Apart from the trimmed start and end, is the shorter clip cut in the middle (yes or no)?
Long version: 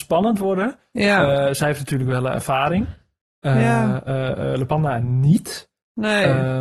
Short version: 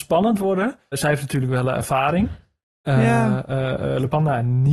yes